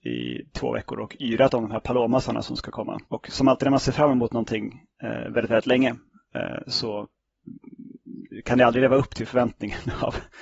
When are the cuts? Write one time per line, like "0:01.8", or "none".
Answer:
0:03.0